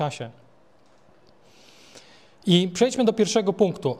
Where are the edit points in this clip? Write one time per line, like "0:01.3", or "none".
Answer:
none